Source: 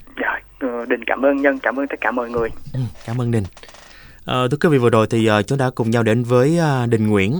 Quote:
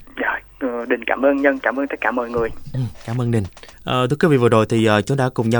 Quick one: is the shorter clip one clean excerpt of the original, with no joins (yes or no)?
no